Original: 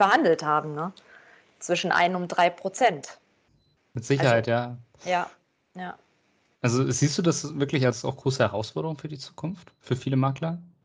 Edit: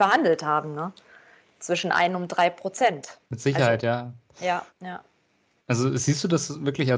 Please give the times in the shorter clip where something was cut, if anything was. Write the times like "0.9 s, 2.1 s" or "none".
3.3 s, 4.7 s